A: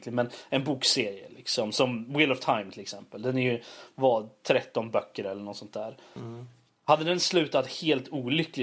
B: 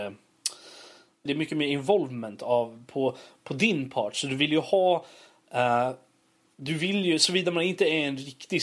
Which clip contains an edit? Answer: B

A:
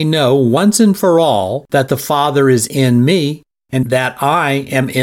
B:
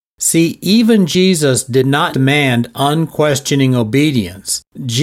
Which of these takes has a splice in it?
B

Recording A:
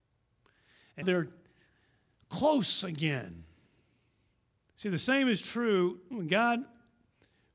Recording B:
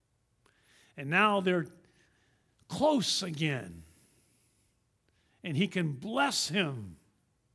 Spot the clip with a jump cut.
A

